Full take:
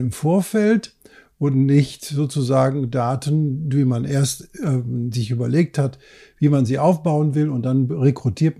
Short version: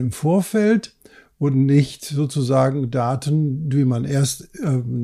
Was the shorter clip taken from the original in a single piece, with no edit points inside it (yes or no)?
yes